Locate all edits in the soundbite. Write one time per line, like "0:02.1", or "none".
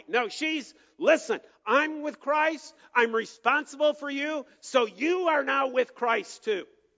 none